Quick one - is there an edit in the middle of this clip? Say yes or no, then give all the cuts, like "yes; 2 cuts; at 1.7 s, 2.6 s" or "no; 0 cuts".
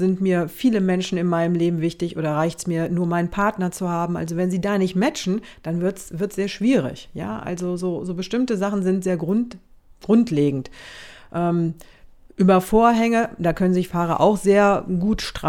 no; 0 cuts